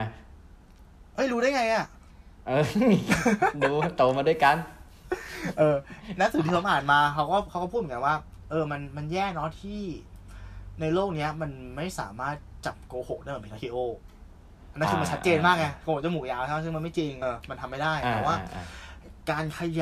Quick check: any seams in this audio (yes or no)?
yes